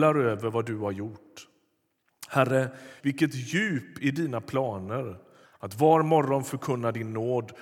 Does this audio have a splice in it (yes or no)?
yes